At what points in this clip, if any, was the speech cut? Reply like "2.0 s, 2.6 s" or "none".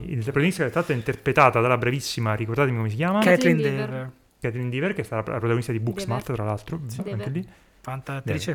7.0 s